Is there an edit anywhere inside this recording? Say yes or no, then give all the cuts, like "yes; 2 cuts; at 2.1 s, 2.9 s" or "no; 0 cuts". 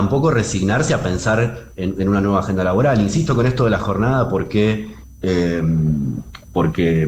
no; 0 cuts